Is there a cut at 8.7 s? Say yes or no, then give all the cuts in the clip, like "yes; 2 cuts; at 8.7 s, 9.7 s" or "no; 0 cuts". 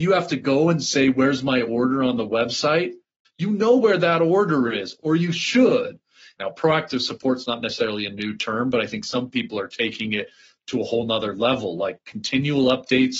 no; 2 cuts; at 3.2 s, 6.4 s